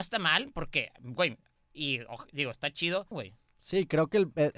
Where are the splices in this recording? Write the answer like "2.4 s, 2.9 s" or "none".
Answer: 1.6 s, 3.1 s

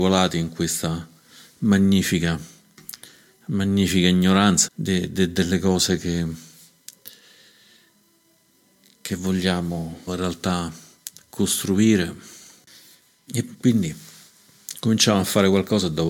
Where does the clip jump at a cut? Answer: 4.7 s, 10.1 s, 13.3 s

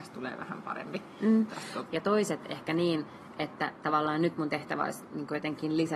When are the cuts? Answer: 1.9 s

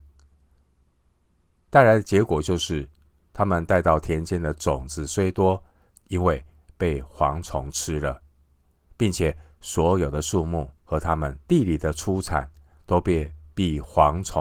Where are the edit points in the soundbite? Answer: 5.9 s, 10.8 s

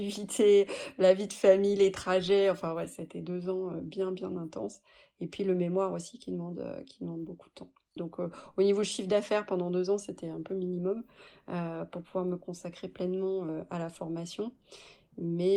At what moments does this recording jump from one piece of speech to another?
8.0 s

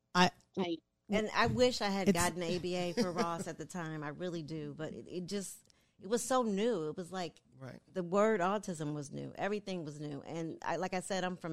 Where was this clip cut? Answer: none

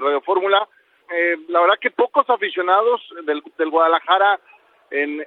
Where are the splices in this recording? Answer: 1.0 s

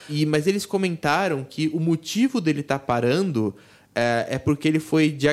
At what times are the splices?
none

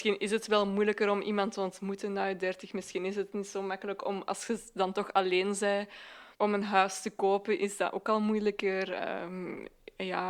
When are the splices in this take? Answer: 6.3 s

